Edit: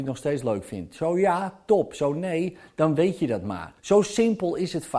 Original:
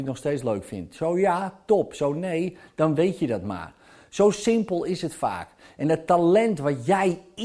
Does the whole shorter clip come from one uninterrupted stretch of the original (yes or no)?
no